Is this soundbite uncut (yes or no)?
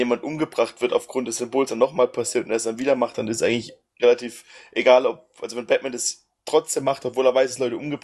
yes